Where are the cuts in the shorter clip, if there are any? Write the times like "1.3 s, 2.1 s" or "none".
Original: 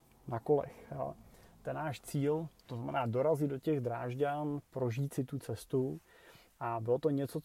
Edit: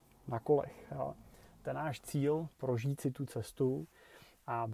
2.5 s